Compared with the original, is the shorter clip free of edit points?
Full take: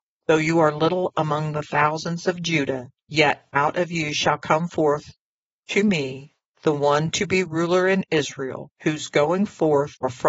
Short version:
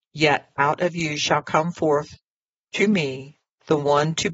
yes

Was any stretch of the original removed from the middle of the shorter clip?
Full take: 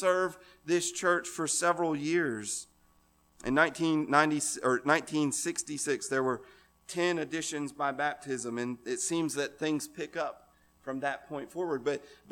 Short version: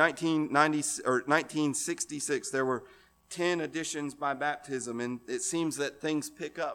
no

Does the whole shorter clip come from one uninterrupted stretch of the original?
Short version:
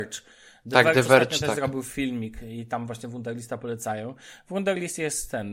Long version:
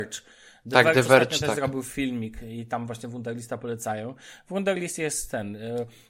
yes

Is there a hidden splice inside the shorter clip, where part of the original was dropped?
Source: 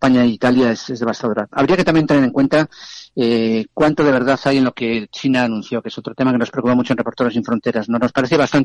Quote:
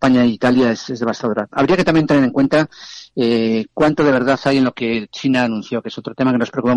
no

